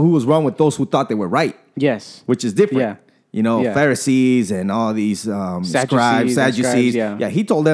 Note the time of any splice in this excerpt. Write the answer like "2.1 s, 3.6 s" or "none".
none